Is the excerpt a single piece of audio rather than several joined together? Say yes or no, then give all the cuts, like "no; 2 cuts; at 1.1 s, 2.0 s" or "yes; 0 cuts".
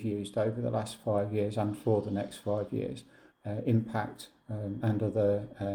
no; 2 cuts; at 3.3 s, 4.8 s